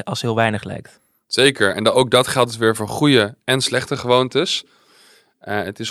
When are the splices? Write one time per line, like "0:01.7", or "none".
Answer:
none